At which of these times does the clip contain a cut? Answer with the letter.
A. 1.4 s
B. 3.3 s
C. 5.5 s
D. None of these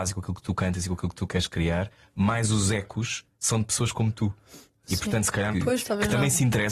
C